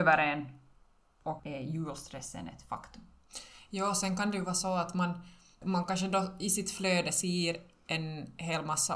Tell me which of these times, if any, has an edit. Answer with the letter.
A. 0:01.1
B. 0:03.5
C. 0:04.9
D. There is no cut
D